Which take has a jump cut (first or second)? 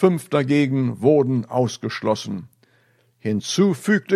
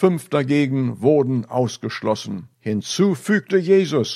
second